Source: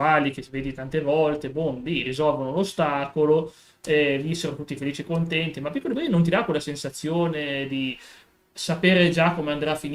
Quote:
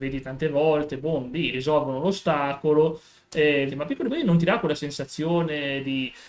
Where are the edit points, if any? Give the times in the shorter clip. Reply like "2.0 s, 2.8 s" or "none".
3.7 s

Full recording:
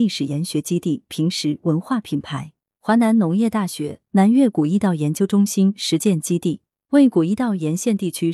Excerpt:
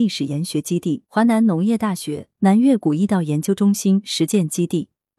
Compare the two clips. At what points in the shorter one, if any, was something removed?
1.0 s

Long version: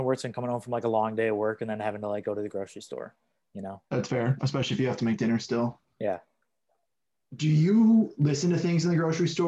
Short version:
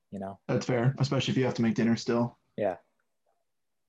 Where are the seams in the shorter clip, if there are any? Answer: none

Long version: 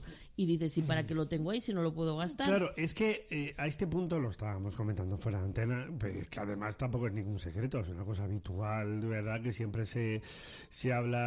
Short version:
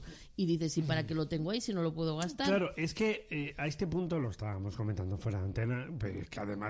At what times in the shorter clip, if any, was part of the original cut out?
none

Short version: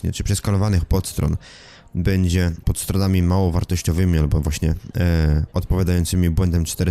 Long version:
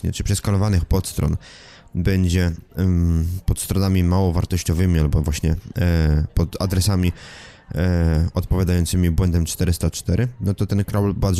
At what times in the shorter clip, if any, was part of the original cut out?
2.6 s, 5.5 s

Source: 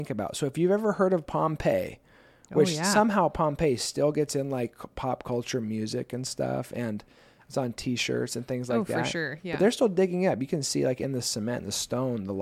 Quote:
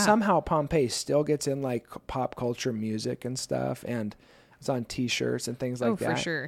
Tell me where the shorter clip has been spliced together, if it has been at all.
none

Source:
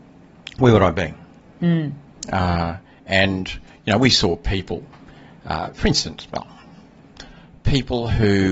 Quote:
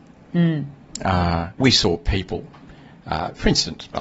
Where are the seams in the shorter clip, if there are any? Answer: 1.6 s

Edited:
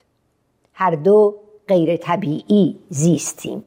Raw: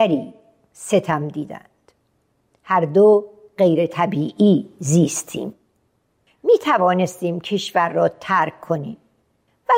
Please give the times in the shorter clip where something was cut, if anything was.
none

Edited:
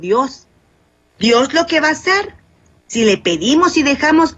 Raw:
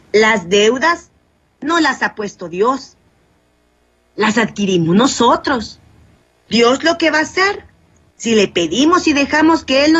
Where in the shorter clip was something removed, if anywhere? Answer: 1.1 s

